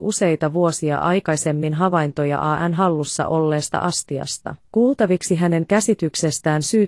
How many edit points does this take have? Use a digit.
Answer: 1